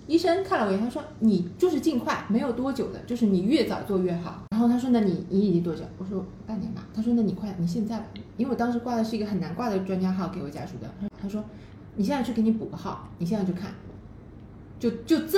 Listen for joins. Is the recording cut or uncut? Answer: uncut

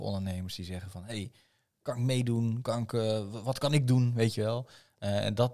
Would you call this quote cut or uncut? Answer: uncut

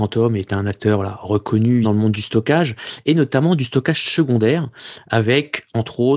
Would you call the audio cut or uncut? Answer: cut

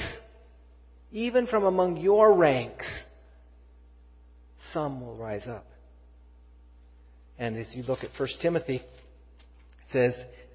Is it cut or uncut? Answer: uncut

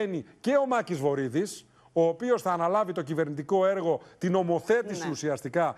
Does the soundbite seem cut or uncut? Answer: uncut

